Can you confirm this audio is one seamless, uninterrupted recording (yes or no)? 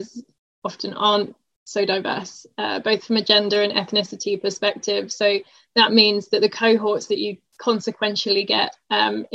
yes